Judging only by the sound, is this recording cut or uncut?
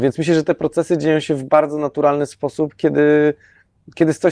uncut